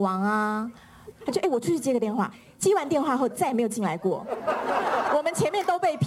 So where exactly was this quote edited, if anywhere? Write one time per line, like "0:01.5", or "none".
0:01.1